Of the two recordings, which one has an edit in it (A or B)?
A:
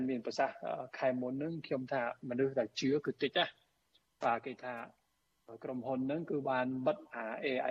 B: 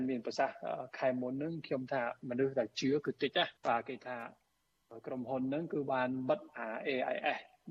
B